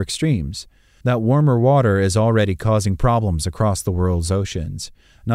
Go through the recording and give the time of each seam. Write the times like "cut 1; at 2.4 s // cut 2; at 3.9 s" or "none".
cut 1; at 1.0 s